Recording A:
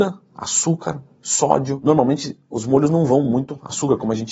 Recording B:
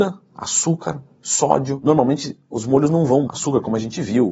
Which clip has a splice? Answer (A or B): B